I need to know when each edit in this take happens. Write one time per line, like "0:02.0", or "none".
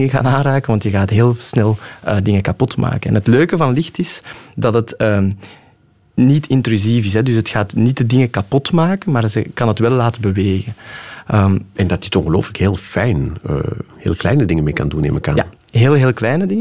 none